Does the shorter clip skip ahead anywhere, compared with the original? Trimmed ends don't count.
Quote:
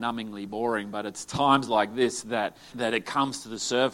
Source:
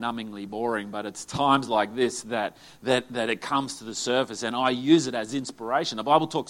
yes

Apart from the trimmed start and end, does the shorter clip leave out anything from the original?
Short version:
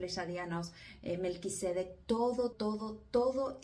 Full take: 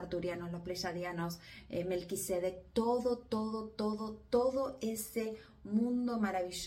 yes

